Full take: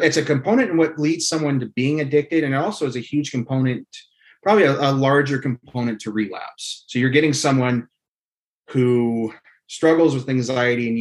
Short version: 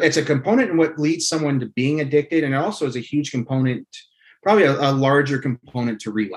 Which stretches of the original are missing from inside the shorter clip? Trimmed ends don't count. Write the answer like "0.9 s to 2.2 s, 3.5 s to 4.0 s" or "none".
none